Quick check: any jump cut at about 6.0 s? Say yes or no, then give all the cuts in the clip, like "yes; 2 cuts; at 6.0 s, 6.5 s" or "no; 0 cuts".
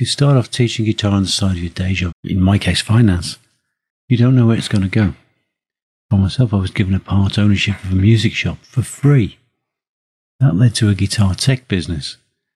yes; 2 cuts; at 2.1 s, 6.0 s